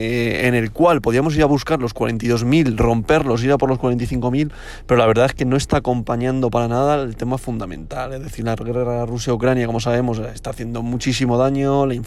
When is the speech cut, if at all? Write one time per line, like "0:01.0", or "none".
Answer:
none

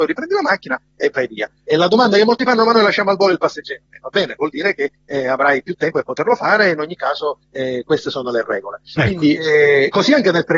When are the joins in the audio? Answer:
none

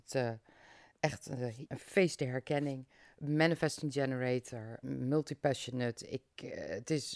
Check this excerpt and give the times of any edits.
0:01.7
0:04.8

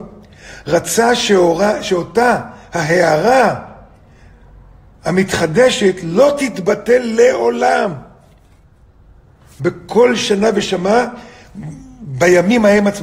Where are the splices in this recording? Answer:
none

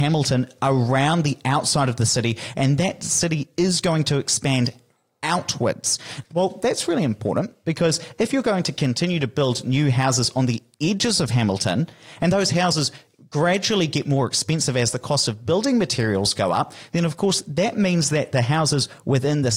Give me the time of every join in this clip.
0:06.2

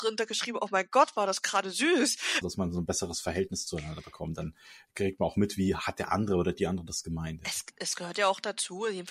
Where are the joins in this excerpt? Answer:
0:02.4
0:07.7

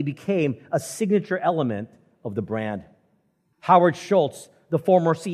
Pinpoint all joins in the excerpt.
0:03.5

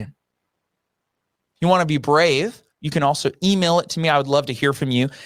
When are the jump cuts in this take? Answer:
0:02.7

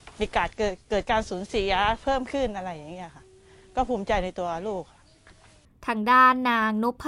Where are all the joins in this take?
none

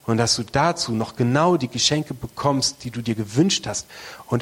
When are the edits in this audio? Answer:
none

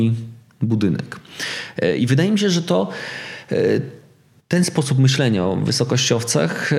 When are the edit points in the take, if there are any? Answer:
none

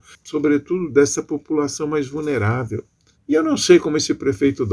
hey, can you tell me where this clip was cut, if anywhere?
0:03.1

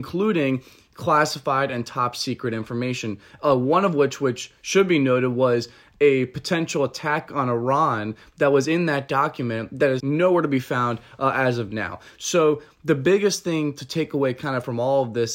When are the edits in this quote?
0:10.0

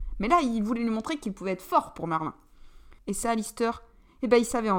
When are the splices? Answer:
0:03.0

